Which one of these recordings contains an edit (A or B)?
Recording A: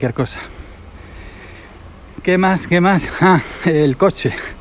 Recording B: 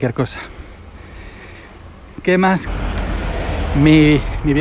B